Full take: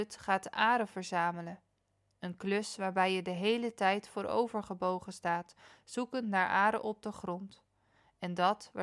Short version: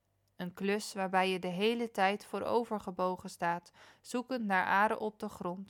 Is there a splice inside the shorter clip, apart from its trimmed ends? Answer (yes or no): no